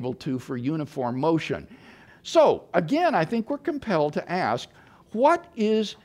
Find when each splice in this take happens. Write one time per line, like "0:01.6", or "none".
0:02.1